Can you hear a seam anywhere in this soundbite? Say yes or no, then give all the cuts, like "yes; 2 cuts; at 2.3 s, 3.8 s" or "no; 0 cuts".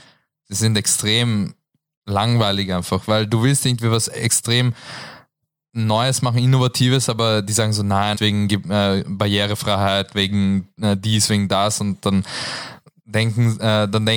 yes; 1 cut; at 8.1 s